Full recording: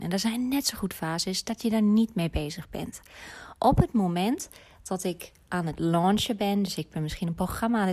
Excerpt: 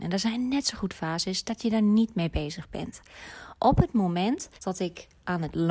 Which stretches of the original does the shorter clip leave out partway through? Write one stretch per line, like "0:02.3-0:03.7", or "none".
0:04.6-0:04.8